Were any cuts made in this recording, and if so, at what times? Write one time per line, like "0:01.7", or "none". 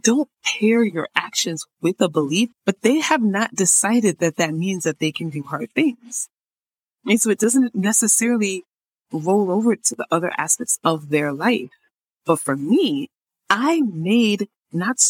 0:02.5